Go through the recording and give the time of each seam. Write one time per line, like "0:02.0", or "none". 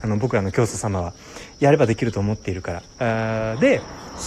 0:03.0